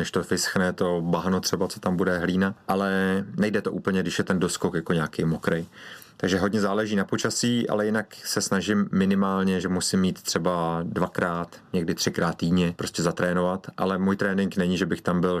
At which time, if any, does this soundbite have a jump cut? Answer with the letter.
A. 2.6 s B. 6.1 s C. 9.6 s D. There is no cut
D